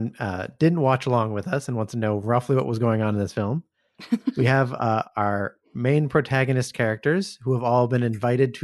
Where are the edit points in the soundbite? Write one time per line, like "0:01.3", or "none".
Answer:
none